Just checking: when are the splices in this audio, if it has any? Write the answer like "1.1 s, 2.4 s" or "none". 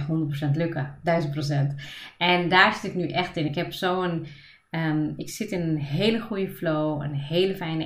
none